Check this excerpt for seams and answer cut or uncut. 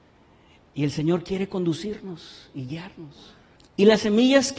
cut